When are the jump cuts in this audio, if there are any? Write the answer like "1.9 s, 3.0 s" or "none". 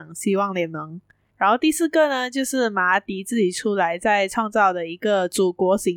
1.3 s